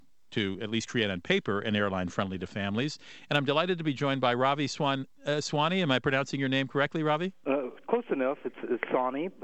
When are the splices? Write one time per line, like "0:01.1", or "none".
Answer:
none